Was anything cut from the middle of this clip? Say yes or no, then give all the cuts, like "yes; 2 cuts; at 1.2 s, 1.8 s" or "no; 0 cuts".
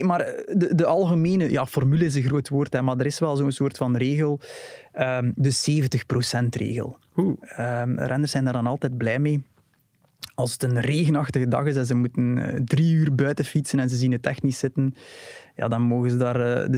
no; 0 cuts